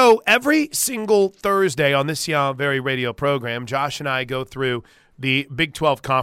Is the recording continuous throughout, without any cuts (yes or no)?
yes